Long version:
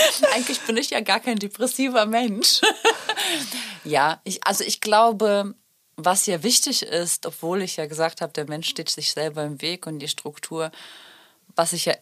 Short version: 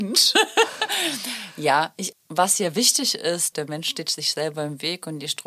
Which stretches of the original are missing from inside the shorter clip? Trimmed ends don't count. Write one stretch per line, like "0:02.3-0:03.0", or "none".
0:04.4-0:05.8
0:07.2-0:08.3